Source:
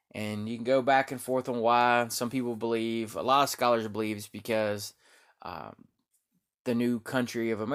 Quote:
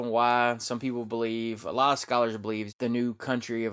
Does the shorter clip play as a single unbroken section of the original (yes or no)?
no